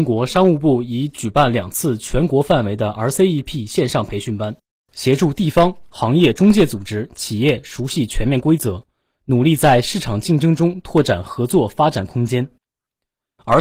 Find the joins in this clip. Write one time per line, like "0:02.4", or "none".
none